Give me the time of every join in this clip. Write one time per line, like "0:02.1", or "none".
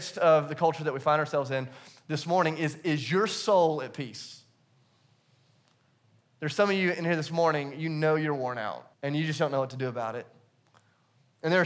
0:06.2
0:08.9